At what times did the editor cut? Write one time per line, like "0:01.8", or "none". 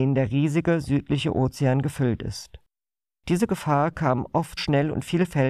0:04.6